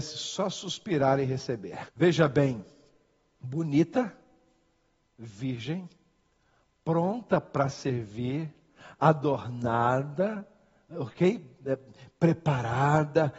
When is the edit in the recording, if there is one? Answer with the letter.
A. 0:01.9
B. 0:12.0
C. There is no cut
A